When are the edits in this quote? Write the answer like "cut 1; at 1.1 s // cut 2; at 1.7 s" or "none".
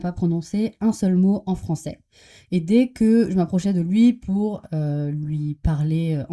none